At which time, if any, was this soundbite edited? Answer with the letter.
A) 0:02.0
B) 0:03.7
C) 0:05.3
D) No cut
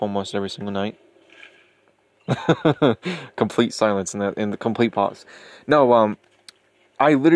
D